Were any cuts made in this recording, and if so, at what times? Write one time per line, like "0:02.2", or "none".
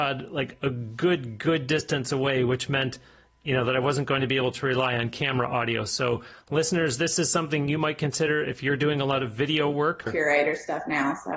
0:10.1